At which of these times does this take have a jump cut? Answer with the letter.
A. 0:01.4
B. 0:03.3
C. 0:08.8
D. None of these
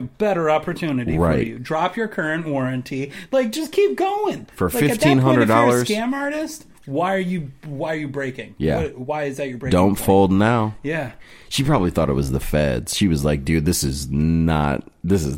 D